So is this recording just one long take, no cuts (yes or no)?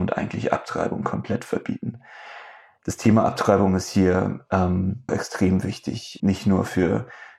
no